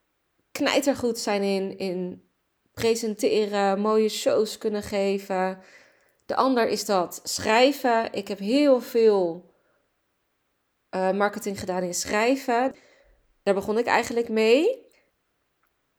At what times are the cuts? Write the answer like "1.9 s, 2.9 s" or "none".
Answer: none

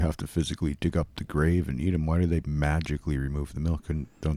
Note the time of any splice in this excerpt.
none

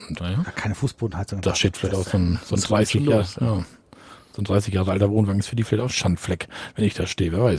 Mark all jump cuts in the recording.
5.9 s

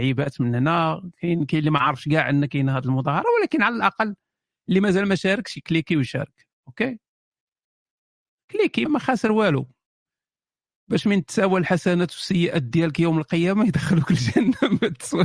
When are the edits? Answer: 8.9 s

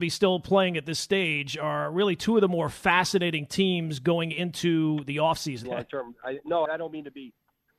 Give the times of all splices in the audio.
5.6 s, 6.7 s

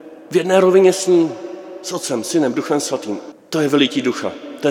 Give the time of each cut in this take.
3.3 s

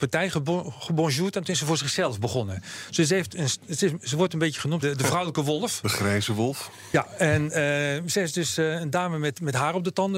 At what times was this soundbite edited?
4.8 s, 5.8 s

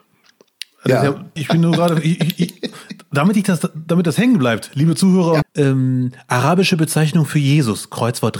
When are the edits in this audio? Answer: 1.4 s, 5.4 s

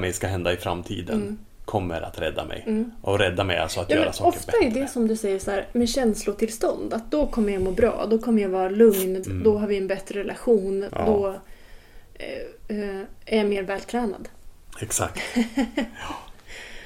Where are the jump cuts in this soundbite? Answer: 9.2 s, 10.9 s

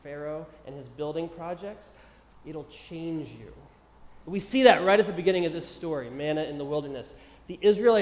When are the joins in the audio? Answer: 2.3 s, 4.2 s

